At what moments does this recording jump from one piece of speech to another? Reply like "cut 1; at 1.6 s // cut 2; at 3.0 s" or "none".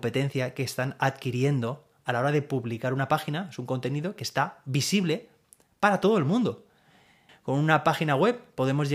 cut 1; at 7.3 s